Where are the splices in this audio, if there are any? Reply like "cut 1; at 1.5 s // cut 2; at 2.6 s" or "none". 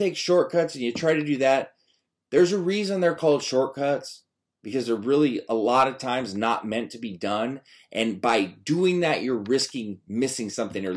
none